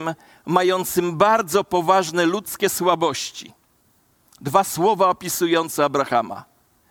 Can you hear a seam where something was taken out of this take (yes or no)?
no